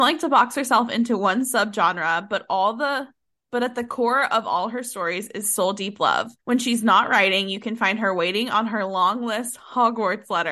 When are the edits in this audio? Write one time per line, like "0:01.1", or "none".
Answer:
0:06.4